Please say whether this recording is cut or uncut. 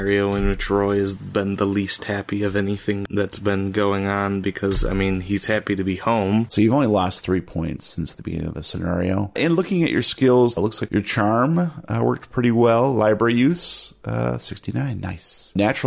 cut